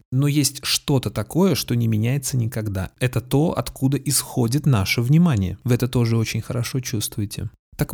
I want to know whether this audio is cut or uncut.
cut